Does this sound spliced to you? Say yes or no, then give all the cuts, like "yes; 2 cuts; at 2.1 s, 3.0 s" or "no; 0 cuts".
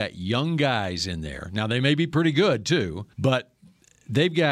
yes; 1 cut; at 3.1 s